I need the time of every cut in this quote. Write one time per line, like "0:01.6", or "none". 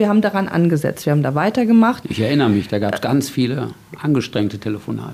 0:02.0